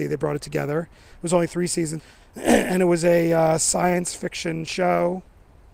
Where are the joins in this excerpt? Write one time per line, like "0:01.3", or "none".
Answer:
0:02.0